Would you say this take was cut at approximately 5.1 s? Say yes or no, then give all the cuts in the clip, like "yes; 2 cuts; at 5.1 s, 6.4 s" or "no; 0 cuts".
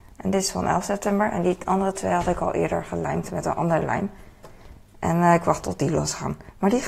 no; 0 cuts